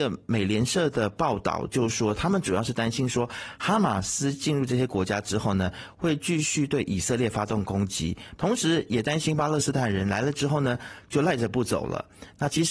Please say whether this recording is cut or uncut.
cut